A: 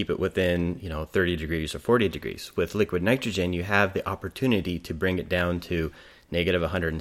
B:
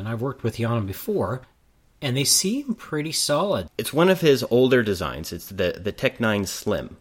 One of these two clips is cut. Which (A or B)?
B